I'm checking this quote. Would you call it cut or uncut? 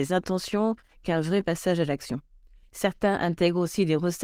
cut